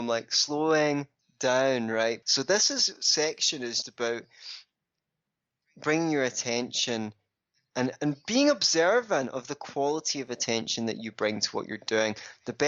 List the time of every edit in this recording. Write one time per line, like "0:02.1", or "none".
0:02.2
0:03.8